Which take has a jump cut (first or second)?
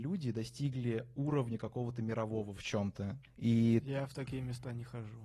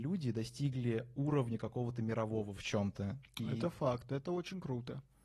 first